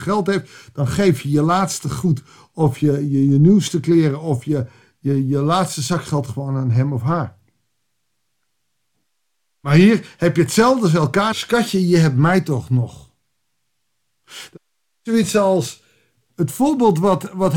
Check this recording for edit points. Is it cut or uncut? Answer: cut